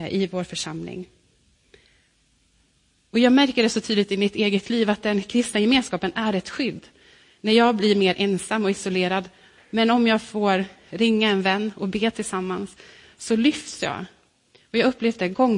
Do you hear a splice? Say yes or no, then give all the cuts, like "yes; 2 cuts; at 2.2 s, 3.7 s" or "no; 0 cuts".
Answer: yes; 2 cuts; at 9.6 s, 13.0 s